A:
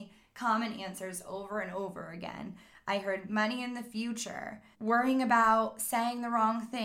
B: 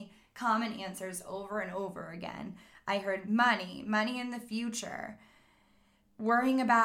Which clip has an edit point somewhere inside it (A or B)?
A